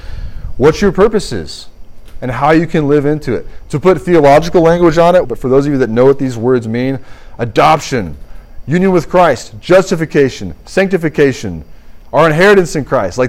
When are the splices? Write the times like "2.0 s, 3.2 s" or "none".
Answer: 5.2 s